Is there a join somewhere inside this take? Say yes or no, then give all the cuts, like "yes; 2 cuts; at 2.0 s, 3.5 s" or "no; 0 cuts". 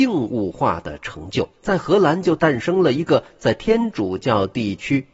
yes; 1 cut; at 1.6 s